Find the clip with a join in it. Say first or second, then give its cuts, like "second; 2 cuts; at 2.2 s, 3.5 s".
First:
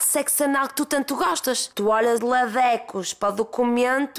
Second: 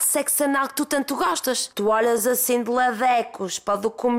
first; 1 cut; at 2.2 s